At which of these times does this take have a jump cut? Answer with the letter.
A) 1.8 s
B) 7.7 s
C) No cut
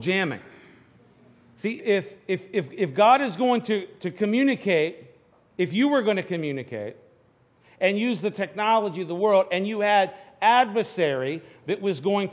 A